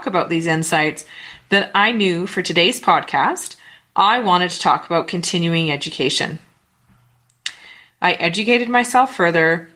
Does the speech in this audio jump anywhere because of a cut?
yes; 1 cut; at 7.9 s

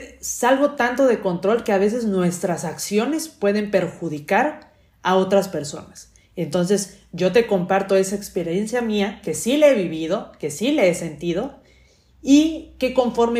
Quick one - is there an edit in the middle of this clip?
no; 0 cuts

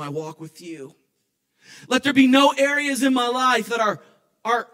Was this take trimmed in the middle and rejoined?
no; 0 cuts

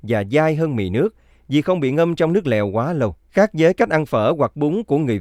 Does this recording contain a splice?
yes; 1 cut; at 3.2 s

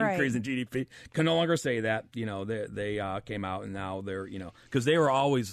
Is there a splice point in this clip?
no; 0 cuts

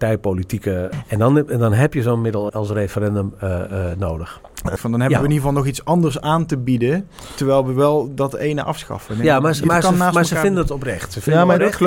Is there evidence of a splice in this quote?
yes; 3 cuts; at 0.9 s, 2.5 s, 4.8 s

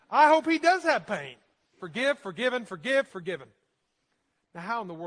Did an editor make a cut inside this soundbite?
yes; 2 cuts; at 1.8 s, 3.1 s

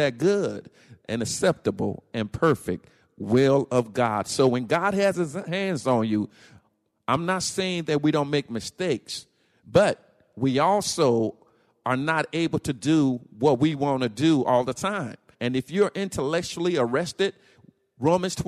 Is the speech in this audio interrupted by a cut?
yes; 1 cut; at 15.3 s

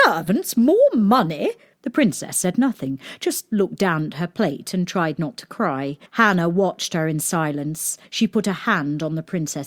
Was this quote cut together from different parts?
yes; 3 cuts; at 1.7 s, 6.1 s, 8.0 s

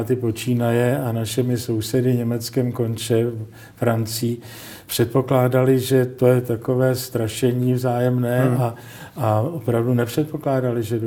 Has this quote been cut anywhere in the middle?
no; 0 cuts

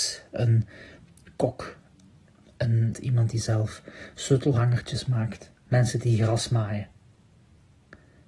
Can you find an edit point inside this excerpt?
yes; 2 cuts; at 2.9 s, 5.6 s

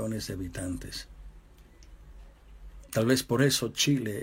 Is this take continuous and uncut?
no; 1 cut; at 2.8 s

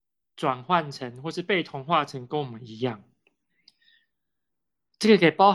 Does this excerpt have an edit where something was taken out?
no; 0 cuts

